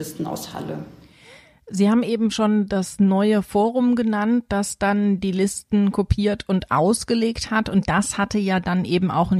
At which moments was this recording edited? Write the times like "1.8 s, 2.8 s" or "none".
none